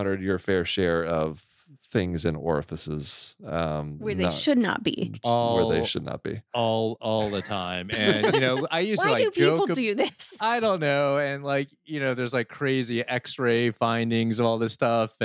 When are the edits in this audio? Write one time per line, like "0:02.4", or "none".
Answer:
none